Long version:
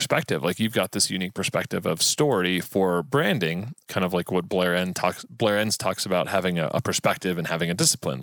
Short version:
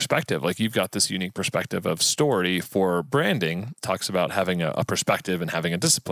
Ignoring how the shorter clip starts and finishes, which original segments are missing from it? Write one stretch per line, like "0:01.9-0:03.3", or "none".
0:03.8-0:05.8